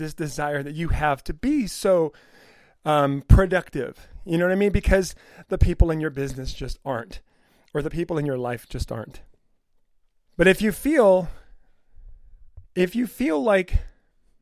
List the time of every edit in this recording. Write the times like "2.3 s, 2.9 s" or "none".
10.3 s, 12.7 s